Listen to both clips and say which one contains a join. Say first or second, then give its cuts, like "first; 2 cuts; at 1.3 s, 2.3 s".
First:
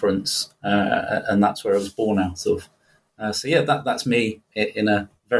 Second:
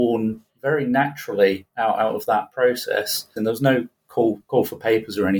second; 1 cut; at 3.4 s